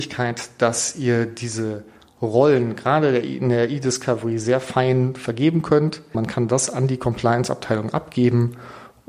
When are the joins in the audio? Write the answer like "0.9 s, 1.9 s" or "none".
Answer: 6.1 s